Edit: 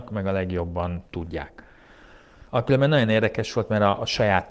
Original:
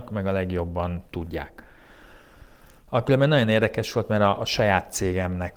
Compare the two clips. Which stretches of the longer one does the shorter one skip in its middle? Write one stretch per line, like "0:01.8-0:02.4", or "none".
0:02.5-0:02.9